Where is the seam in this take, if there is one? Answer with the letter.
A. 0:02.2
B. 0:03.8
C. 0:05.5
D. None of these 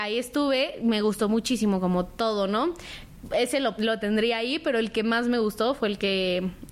B